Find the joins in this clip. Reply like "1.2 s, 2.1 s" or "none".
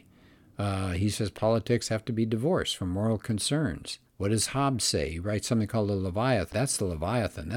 4.1 s, 6.5 s